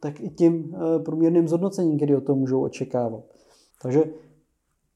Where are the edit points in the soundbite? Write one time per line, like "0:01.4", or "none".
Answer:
0:03.7